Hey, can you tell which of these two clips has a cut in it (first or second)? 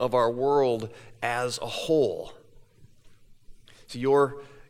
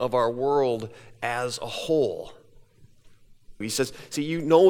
second